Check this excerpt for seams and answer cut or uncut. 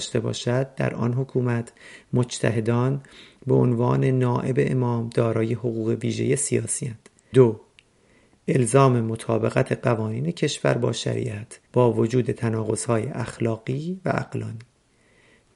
cut